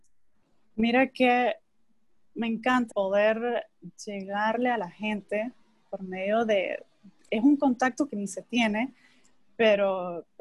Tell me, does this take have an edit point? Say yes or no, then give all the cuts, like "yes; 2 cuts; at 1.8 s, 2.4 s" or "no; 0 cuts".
yes; 1 cut; at 2.9 s